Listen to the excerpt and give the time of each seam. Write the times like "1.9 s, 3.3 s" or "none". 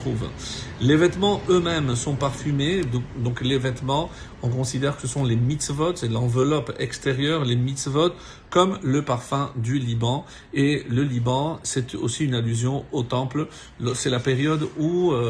none